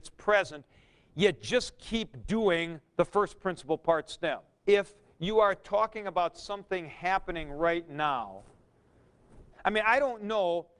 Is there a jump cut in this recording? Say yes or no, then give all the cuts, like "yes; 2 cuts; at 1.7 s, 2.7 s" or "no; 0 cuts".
yes; 2 cuts; at 4.6 s, 9.5 s